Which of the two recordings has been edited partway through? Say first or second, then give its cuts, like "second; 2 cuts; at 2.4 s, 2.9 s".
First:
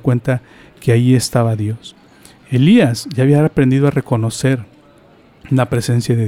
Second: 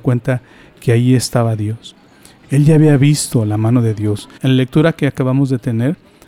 second; 2 cuts; at 2.4 s, 4.4 s